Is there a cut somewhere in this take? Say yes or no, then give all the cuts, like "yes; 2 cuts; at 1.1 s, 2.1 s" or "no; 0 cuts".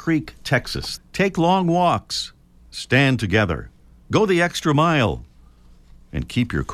yes; 1 cut; at 1.0 s